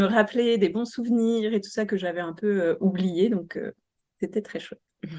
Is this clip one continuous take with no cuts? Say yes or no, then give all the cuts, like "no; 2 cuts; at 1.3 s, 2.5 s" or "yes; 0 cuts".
yes; 0 cuts